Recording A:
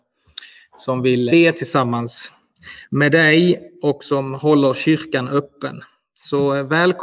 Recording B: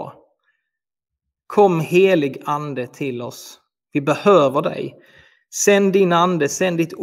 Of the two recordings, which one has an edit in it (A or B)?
A